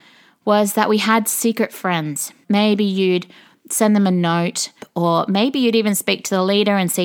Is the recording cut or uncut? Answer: cut